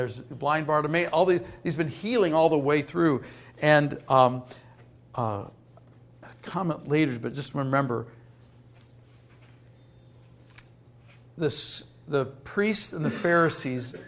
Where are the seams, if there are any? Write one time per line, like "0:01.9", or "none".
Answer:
none